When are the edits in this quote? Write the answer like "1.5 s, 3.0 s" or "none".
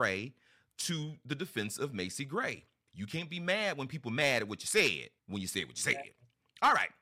2.9 s, 5.2 s